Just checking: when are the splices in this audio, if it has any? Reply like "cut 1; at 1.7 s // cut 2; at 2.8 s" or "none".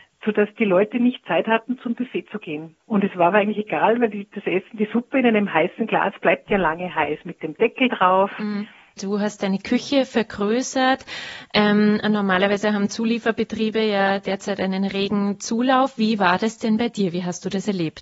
cut 1; at 2.8 s // cut 2; at 9.0 s